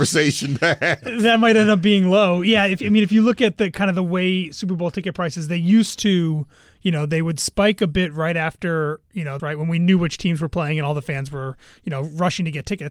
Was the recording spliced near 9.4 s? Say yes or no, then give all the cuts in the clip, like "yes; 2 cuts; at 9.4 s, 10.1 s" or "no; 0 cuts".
yes; 1 cut; at 9.4 s